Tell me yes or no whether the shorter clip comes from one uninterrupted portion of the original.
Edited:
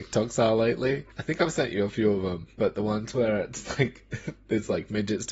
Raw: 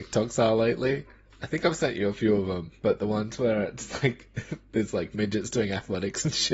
no